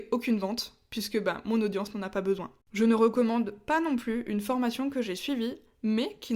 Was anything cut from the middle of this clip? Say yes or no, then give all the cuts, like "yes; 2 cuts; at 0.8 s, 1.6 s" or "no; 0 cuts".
yes; 1 cut; at 2.6 s